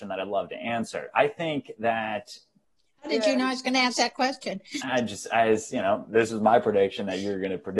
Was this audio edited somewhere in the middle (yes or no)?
no